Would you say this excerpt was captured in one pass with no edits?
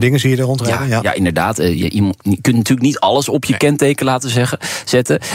yes; 0 cuts

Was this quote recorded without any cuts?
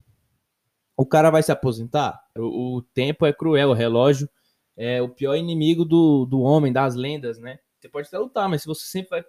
no; 2 cuts; at 2.4 s, 7.8 s

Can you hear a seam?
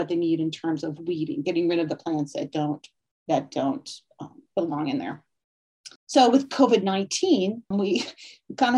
yes; 2 cuts; at 6.0 s, 7.7 s

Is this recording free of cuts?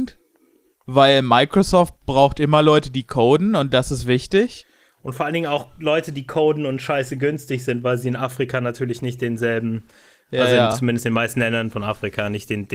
yes; 0 cuts

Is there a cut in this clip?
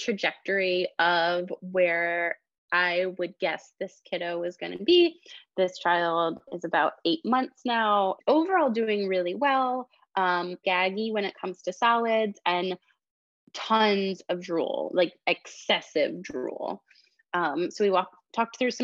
yes; 2 cuts; at 8.2 s, 10.6 s

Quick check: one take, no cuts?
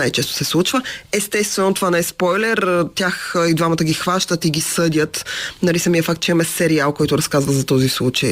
yes; 0 cuts

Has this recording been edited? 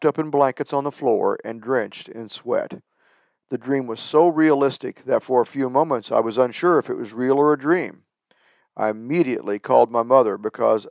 no; 0 cuts

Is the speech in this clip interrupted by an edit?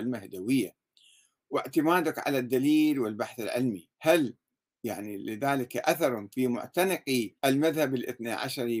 yes; 2 cuts; at 3.9 s, 7.4 s

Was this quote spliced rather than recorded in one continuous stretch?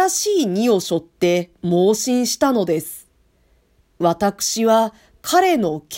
no; 0 cuts

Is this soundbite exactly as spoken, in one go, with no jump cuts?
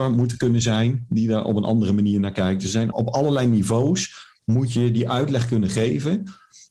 no; 1 cut; at 2.9 s

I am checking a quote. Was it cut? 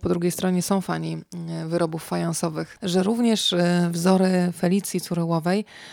yes; 1 cut; at 2.8 s

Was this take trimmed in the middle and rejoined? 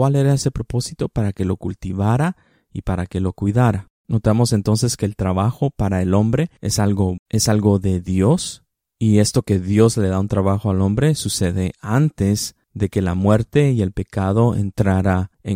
yes; 1 cut; at 7.2 s

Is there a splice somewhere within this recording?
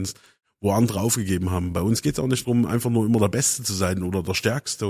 no; 0 cuts

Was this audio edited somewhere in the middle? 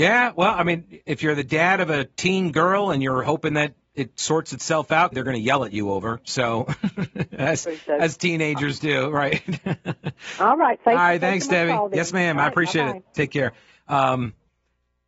yes; 1 cut; at 5.1 s

